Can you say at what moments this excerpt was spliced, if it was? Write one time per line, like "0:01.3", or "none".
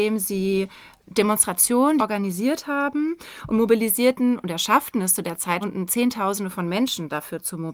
0:02.0
0:05.6